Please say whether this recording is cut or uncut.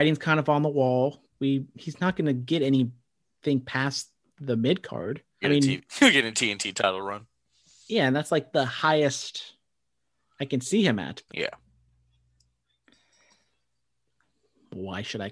cut